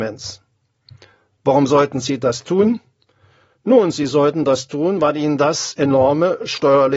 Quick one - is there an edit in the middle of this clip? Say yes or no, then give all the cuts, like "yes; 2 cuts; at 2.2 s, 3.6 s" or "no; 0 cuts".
no; 0 cuts